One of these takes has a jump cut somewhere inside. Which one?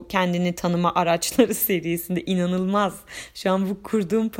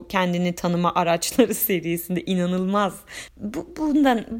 second; 1 cut; at 3.3 s

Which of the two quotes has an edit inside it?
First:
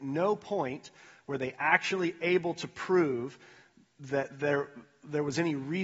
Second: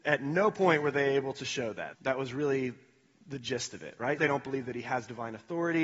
second; 2 cuts; at 1.9 s, 4.2 s

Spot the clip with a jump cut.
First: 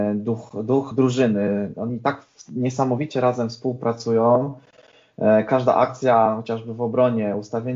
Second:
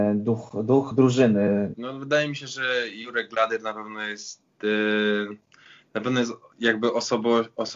second; 1 cut; at 1.7 s

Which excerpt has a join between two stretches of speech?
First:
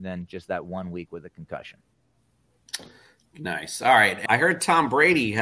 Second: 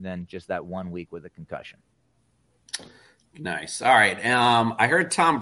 first; 1 cut; at 4.3 s

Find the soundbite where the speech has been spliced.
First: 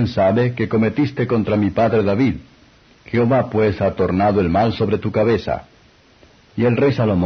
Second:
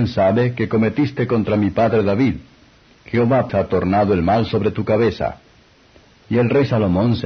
second; 1 cut; at 3.5 s

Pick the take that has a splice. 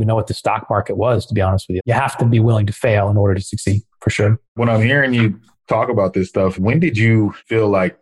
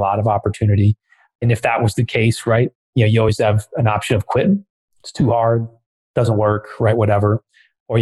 first; 3 cuts; at 1.8 s, 4.4 s, 6.5 s

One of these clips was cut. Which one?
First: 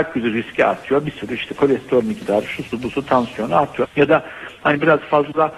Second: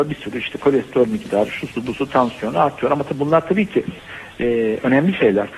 first; 1 cut; at 3.8 s

